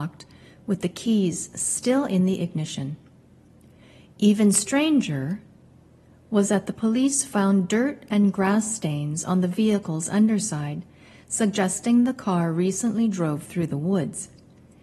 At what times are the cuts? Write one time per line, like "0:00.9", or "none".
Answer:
none